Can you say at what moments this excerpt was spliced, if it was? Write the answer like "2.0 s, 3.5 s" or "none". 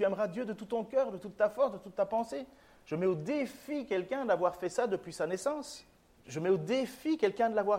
6.2 s

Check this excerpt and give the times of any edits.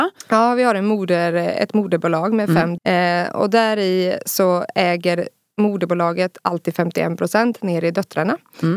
2.8 s

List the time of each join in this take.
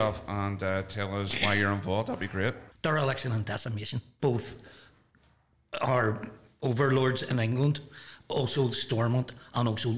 2.7 s, 4.2 s

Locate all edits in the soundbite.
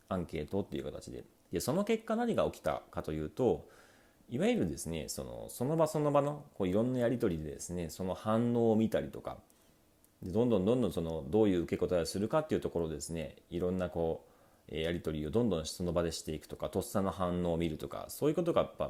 1.5 s

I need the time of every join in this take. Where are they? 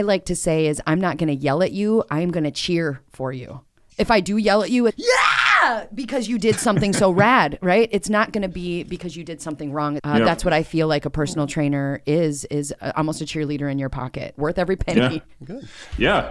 4.9 s, 10.0 s, 14.4 s

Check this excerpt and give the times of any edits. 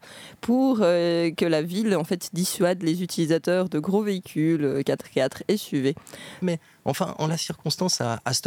6.4 s

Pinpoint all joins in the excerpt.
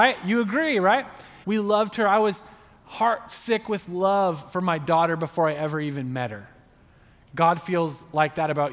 1.4 s

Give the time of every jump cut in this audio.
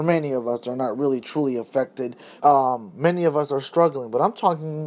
2.4 s

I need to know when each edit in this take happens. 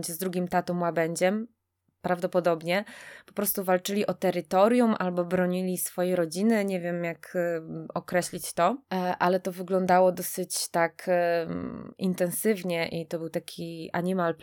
11.9 s

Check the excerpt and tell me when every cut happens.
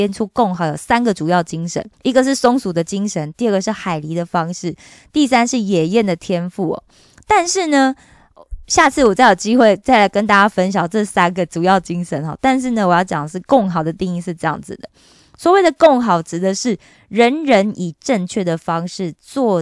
1.9 s

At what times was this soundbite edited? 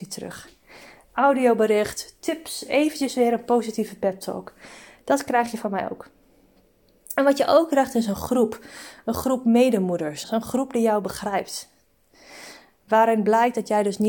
10.2 s

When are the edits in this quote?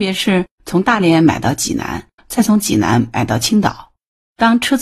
2.2 s

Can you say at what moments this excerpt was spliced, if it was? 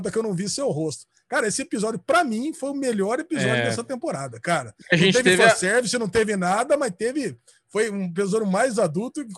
none

